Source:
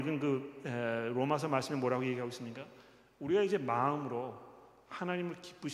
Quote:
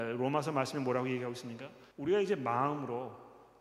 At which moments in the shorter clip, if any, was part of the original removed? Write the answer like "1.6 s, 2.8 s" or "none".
1.9 s